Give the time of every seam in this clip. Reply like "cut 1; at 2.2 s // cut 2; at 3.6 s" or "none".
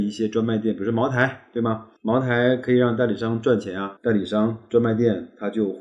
cut 1; at 2.0 s // cut 2; at 4.0 s